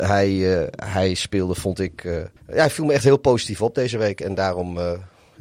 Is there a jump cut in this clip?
yes; 1 cut; at 2.4 s

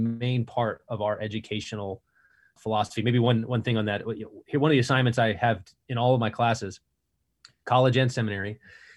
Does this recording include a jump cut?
yes; 1 cut; at 2.6 s

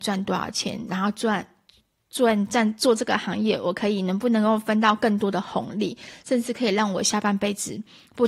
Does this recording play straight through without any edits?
yes; 0 cuts

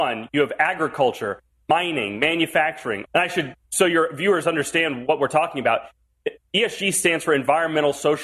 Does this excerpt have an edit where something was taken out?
yes; 2 cuts; at 3.1 s, 5.1 s

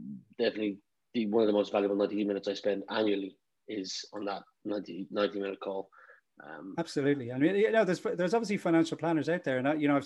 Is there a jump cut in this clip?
no; 0 cuts

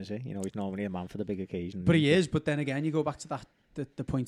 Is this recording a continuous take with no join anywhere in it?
yes; 0 cuts

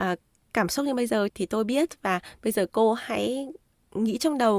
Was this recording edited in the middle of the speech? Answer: yes; 1 cut; at 1.3 s

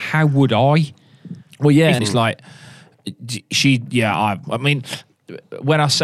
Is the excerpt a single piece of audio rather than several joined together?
no; 2 cuts; at 2.0 s, 4.4 s

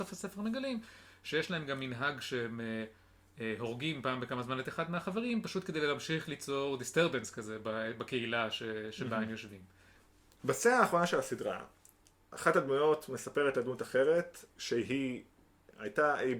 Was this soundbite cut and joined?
no; 0 cuts

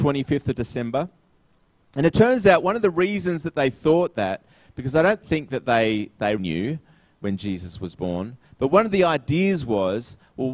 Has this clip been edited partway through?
yes; 1 cut; at 6.4 s

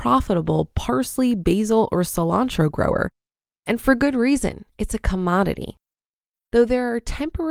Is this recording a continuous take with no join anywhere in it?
yes; 0 cuts

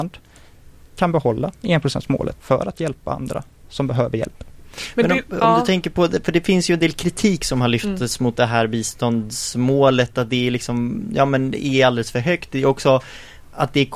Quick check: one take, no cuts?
no; 1 cut; at 2.4 s

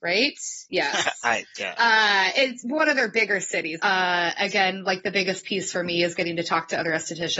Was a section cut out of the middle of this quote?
yes; 1 cut; at 3.8 s

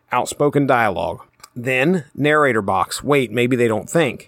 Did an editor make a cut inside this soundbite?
no; 0 cuts

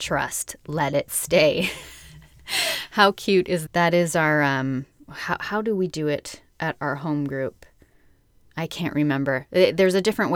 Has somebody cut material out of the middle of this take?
yes; 1 cut; at 3.7 s

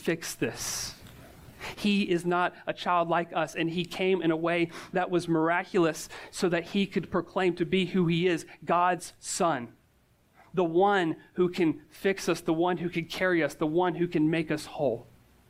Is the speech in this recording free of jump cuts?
no; 1 cut; at 1.7 s

